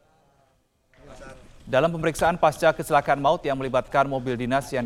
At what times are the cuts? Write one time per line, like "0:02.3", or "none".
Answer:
0:01.6